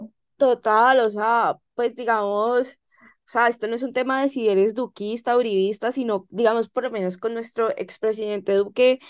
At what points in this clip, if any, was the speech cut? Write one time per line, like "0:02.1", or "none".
none